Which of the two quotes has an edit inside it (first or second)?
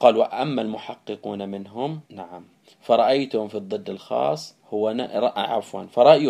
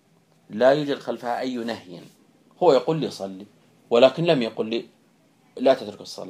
first